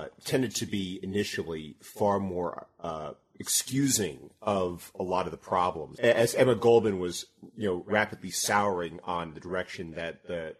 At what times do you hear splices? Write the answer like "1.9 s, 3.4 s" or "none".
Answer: 6.0 s